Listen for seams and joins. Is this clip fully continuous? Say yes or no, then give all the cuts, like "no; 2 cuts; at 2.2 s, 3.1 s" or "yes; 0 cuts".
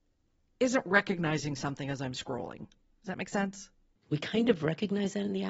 no; 1 cut; at 4.0 s